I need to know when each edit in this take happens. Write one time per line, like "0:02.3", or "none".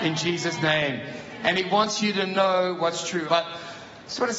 0:03.3